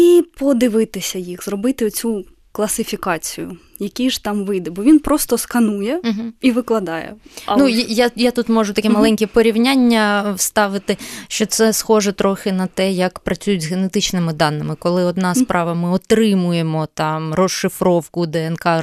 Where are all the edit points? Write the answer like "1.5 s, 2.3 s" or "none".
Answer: none